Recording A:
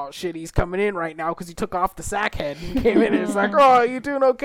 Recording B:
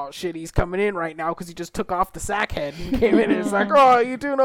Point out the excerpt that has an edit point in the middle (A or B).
A